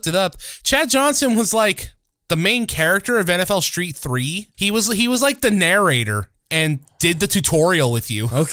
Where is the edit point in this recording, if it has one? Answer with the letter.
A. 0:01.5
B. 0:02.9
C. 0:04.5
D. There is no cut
C